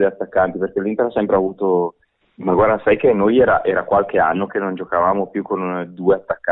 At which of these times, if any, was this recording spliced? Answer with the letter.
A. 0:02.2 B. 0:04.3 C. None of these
A